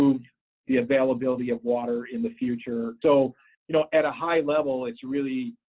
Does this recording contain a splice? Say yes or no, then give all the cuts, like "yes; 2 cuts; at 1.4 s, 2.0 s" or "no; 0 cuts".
yes; 1 cut; at 3.0 s